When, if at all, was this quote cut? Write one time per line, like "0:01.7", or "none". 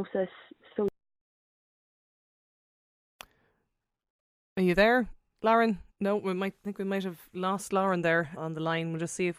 0:05.9
0:08.4

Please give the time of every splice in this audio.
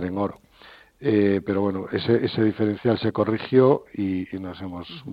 none

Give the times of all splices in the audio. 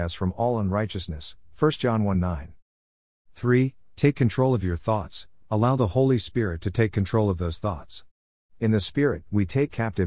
0:05.4

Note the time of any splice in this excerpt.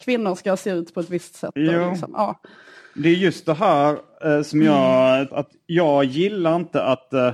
0:05.3

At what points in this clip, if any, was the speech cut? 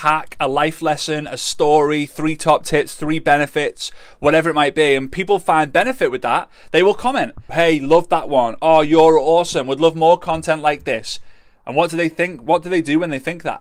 0:07.5

